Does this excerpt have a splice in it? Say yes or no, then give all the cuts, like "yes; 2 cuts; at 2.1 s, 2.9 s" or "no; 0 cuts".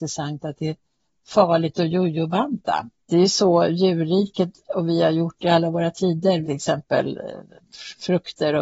yes; 1 cut; at 6.4 s